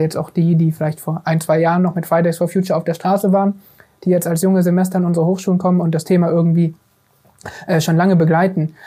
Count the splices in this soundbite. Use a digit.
0